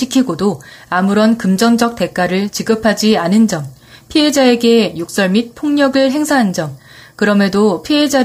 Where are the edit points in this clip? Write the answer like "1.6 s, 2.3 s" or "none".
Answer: none